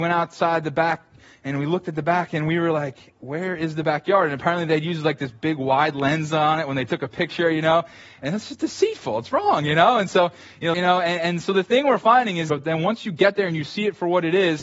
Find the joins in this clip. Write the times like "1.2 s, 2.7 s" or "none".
10.7 s, 12.5 s